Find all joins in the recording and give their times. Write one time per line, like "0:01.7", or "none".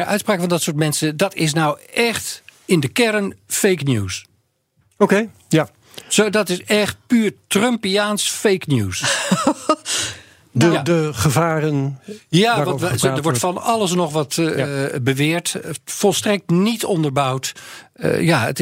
none